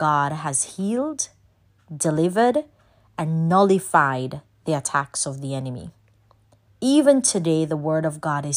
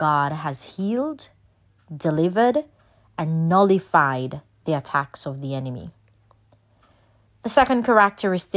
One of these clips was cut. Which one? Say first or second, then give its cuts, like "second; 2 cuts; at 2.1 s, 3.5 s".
first; 1 cut; at 6.7 s